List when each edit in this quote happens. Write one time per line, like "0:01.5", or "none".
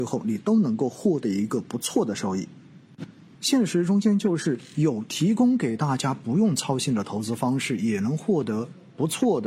0:03.4